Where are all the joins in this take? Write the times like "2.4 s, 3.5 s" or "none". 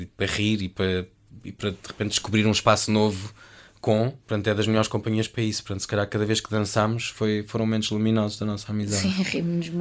none